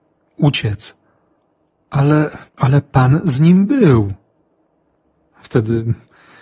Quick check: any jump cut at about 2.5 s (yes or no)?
yes